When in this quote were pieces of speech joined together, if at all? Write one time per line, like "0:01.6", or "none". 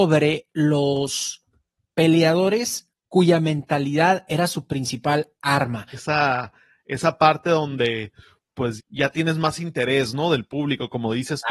0:05.9
0:08.8